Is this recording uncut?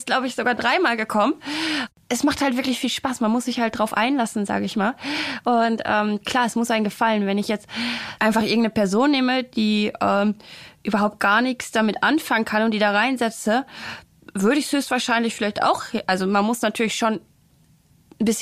no; 1 cut; at 8.2 s

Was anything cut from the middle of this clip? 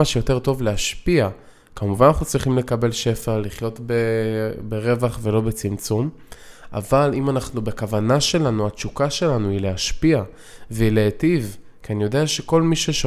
no; 0 cuts

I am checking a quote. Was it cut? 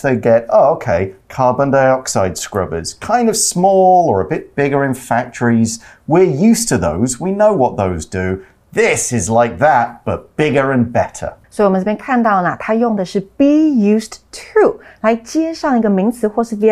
yes; 1 cut; at 11.4 s

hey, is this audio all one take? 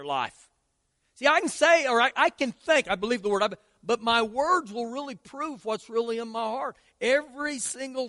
yes; 0 cuts

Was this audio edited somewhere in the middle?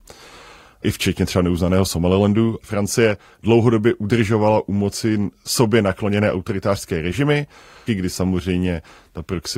yes; 2 cuts; at 2.6 s, 7.9 s

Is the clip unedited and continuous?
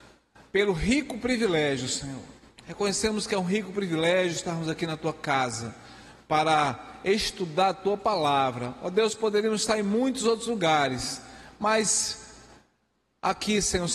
yes; 0 cuts

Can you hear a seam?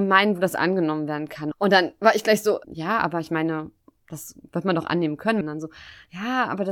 yes; 3 cuts; at 1.5 s, 2.6 s, 5.4 s

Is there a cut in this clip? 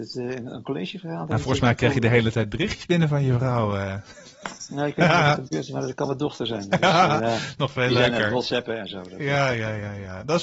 no; 0 cuts

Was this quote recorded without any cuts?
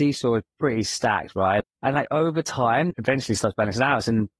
no; 2 cuts; at 1.6 s, 2.9 s

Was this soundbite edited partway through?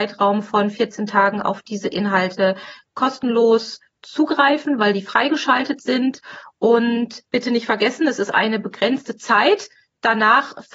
no; 0 cuts

